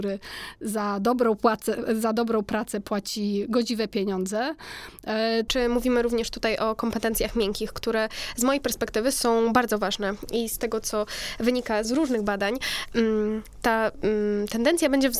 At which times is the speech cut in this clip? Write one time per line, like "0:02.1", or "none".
0:05.5
0:11.8